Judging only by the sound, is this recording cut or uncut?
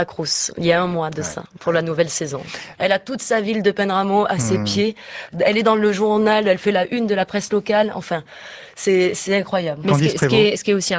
cut